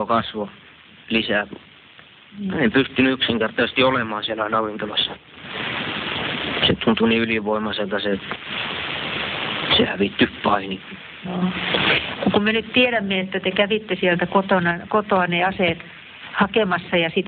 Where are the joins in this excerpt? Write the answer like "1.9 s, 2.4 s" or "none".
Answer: none